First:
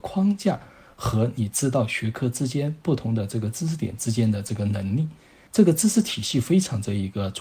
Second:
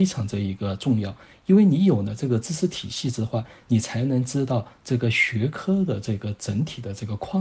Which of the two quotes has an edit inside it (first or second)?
first